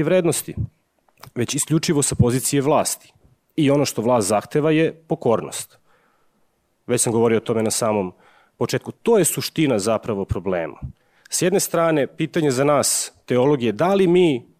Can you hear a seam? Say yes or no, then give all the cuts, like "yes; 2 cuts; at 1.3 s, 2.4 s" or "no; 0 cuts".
no; 0 cuts